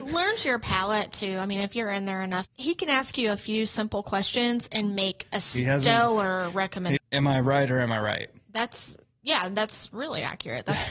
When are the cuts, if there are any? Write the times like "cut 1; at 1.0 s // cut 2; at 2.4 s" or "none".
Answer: cut 1; at 2.4 s // cut 2; at 7.0 s